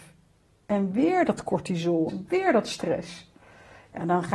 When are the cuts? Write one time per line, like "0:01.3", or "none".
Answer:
0:02.1